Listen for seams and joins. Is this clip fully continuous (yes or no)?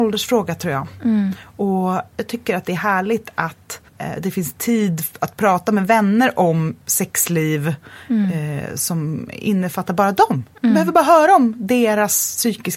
no